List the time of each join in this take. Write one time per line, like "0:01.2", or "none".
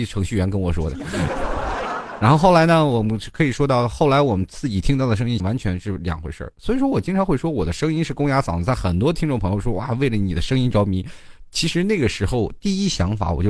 0:05.4